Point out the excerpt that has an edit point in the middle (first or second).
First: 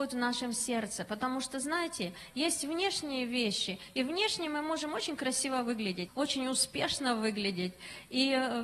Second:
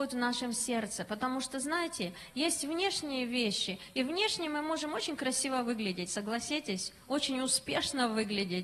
first